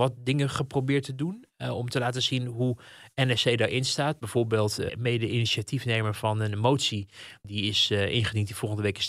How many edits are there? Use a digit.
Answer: 2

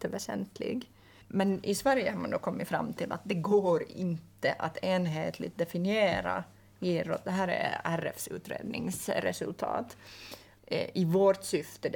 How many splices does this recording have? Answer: 1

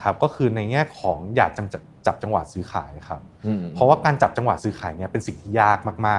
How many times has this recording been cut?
0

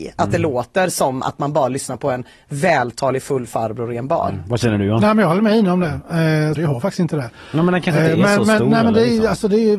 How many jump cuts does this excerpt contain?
1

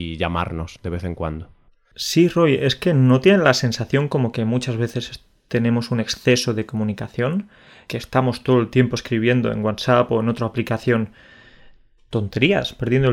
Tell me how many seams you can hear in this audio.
1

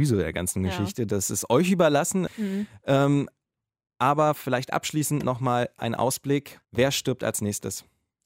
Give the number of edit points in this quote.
2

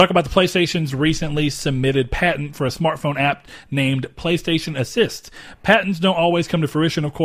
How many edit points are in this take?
0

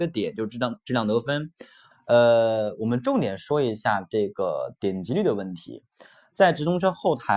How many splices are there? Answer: 1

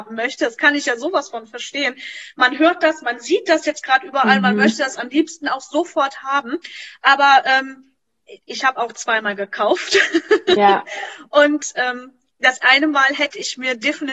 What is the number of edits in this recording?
1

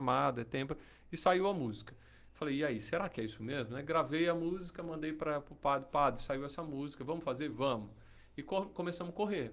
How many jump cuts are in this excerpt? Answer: 1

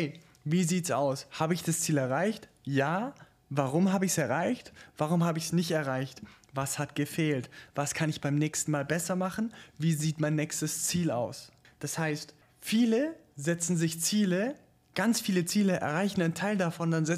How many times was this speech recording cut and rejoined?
1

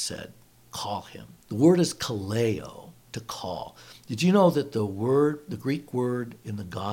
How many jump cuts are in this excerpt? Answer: 1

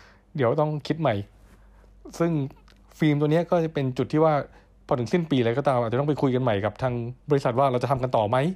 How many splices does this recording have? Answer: 1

